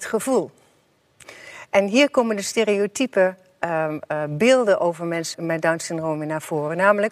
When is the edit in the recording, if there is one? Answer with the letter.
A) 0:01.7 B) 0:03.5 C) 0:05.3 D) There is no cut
C